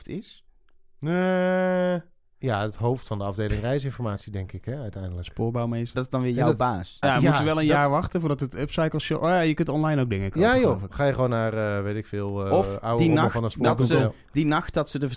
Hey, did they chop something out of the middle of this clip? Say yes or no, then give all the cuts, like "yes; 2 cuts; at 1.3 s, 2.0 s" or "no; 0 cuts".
yes; 2 cuts; at 5.9 s, 7.0 s